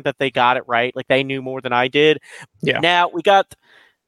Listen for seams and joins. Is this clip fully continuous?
no; 1 cut; at 2.5 s

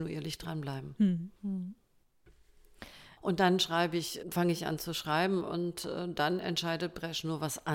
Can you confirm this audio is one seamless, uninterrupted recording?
no; 3 cuts; at 1.4 s, 3.2 s, 4.2 s

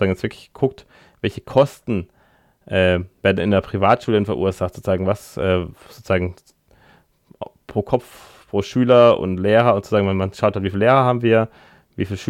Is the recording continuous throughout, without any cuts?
yes; 0 cuts

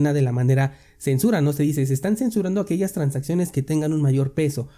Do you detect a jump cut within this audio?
no; 0 cuts

